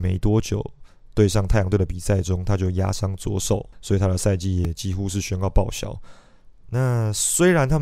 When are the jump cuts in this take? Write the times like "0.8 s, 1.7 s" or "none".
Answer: 3.7 s, 6.5 s

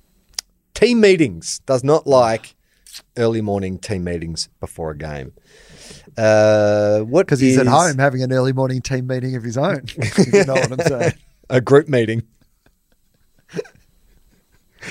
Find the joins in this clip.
none

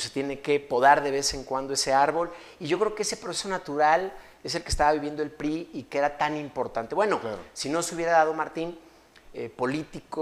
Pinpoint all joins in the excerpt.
none

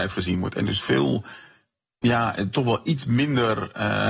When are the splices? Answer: none

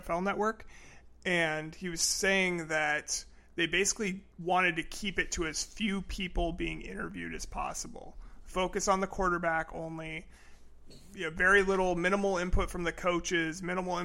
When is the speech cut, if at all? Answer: 4.3 s

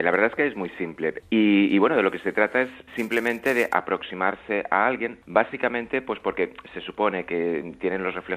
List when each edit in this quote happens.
1.2 s, 2.9 s, 5.2 s

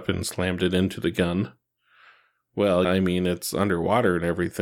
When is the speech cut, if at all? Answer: 2.8 s

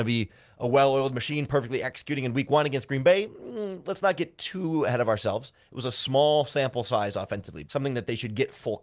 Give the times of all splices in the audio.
7.6 s

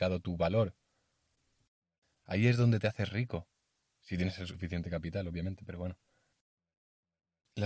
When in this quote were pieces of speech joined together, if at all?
2.1 s

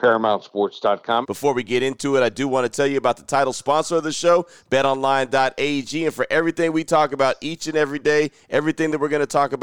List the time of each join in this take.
1.2 s

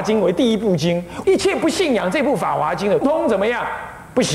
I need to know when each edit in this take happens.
1.2 s, 3.0 s

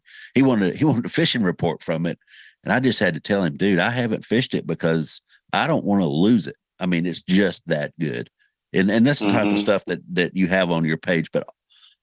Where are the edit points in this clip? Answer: none

